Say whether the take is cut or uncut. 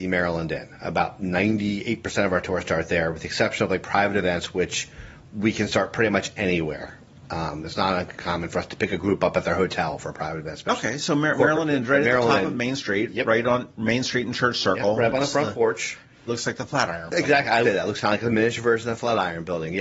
cut